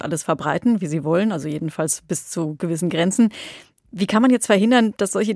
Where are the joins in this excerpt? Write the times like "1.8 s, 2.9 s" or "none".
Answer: none